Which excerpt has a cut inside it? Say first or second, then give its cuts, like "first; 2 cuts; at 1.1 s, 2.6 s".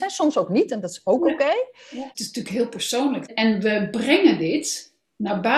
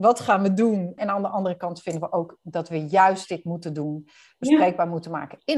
second; 1 cut; at 1.0 s